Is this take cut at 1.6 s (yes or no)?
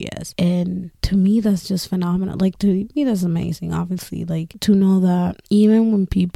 no